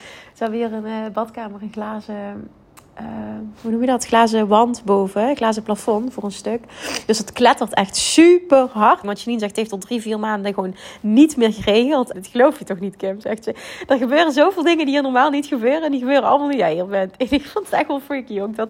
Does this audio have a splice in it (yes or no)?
yes